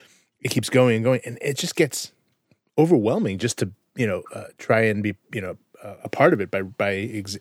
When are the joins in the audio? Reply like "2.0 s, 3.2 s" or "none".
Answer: none